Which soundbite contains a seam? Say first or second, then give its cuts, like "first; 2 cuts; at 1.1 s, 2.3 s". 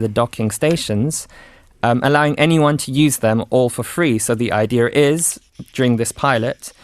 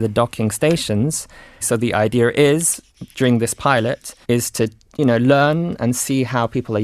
second; 2 cuts; at 1.6 s, 4.2 s